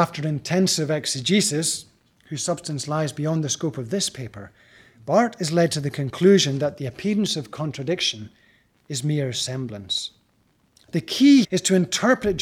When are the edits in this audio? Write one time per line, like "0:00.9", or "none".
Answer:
0:11.4